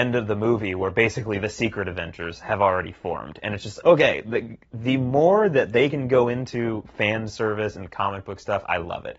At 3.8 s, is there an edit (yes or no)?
yes